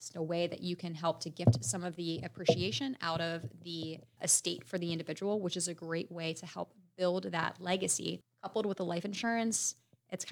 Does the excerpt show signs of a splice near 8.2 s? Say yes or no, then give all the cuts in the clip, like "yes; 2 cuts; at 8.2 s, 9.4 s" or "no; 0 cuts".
no; 0 cuts